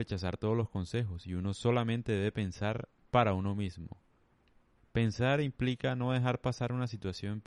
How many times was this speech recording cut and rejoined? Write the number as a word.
zero